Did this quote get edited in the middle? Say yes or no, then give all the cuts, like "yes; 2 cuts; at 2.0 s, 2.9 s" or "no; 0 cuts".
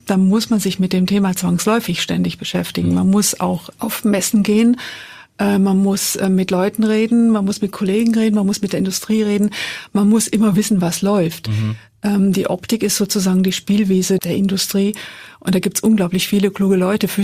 no; 0 cuts